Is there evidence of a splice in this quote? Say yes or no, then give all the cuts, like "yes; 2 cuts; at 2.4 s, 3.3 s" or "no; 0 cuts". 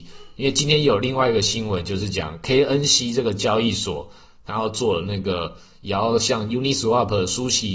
no; 0 cuts